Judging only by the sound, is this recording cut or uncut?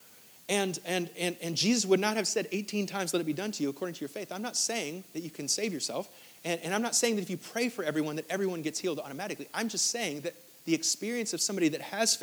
cut